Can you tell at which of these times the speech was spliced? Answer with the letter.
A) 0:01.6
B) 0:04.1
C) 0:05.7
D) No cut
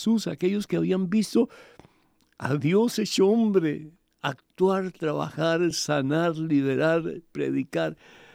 D